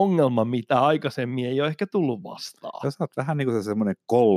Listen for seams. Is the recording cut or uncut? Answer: uncut